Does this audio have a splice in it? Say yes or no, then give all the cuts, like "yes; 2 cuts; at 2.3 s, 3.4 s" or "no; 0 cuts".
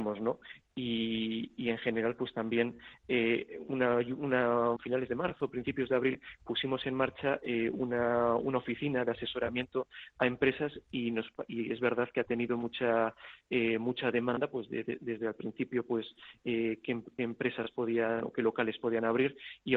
yes; 1 cut; at 4.8 s